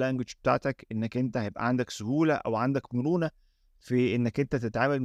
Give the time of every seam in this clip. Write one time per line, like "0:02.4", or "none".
none